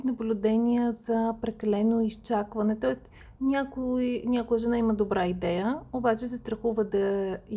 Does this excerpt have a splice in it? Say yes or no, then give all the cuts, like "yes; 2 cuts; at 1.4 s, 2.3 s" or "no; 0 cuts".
no; 0 cuts